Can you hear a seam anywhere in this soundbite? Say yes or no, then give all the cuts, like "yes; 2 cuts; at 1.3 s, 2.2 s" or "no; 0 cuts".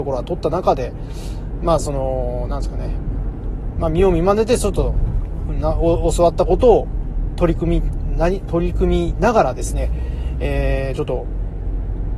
no; 0 cuts